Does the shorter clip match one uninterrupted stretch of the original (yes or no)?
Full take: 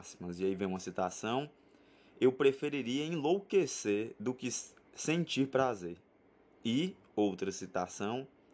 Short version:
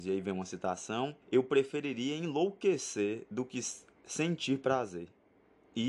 no